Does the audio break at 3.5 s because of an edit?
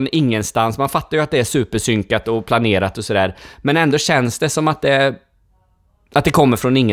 no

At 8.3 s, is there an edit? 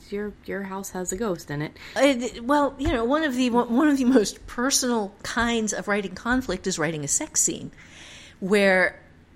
no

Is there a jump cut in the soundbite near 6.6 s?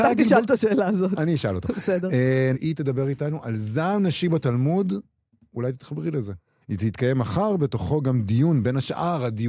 yes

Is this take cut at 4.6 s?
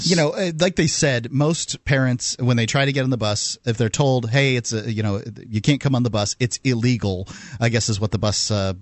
no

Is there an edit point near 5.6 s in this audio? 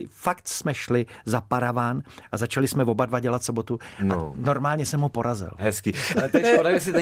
no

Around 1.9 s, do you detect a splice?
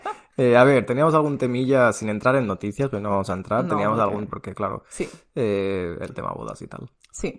no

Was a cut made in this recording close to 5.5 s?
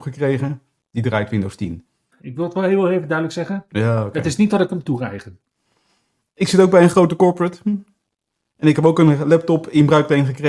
no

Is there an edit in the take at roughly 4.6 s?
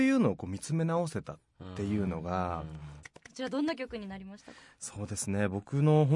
no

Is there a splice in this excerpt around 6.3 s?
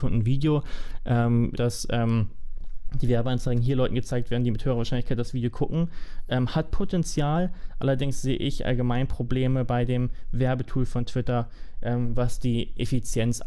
no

